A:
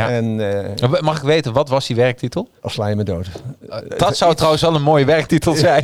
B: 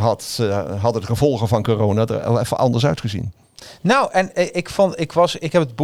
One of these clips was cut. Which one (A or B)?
A